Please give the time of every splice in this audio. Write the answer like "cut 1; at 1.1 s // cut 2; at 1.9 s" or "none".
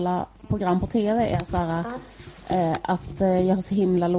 none